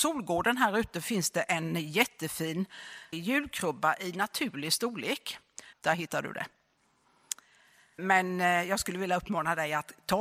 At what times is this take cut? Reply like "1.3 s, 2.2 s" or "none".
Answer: 3.1 s, 5.7 s, 8.0 s